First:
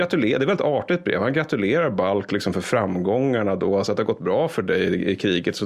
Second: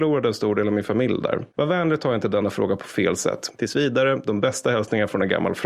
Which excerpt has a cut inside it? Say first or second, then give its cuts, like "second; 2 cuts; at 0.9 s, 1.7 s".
second; 1 cut; at 3.5 s